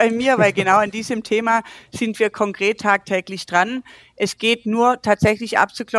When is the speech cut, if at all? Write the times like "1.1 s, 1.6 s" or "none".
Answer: none